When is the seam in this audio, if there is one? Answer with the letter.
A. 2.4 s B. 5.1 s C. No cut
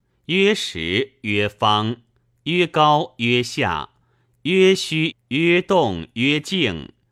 B